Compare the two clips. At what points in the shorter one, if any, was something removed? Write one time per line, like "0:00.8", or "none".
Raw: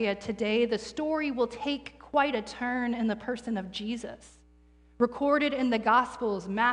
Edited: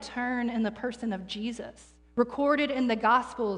0:02.0